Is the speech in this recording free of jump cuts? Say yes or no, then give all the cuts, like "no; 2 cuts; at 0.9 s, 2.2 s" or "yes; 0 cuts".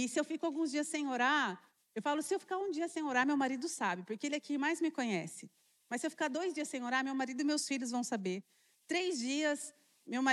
yes; 0 cuts